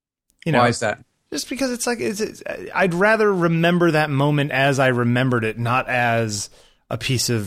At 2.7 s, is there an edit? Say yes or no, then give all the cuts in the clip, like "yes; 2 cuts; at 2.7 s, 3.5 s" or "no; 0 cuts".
no; 0 cuts